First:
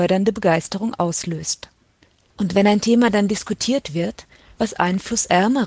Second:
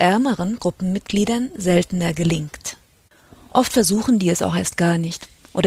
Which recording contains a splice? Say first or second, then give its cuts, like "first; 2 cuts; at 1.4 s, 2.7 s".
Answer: first; 2 cuts; at 2.3 s, 4.6 s